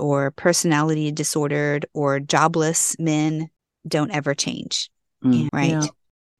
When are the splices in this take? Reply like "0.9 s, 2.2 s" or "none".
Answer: 5.5 s